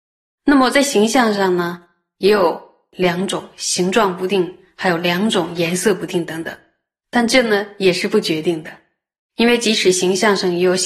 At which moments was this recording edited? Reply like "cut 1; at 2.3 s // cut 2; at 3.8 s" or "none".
none